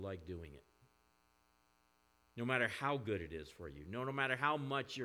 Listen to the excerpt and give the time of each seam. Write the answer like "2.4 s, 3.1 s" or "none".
none

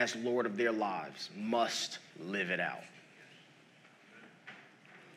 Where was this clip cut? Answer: 2.1 s

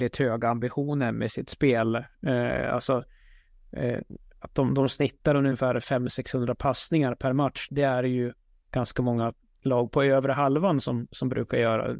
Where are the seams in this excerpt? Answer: 7.7 s

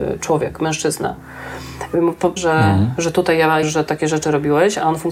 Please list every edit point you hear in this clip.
2.4 s, 3.6 s

